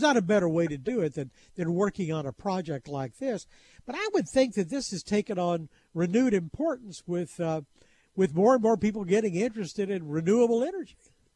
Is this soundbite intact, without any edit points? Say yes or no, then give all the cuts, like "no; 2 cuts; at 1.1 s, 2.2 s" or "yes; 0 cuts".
yes; 0 cuts